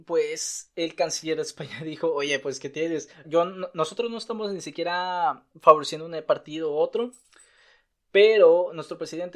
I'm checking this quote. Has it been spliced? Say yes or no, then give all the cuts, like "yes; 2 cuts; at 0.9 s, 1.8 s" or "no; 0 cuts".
yes; 1 cut; at 3.2 s